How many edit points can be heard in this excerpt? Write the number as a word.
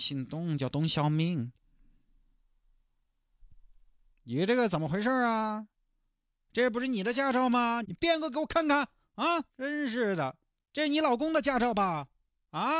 three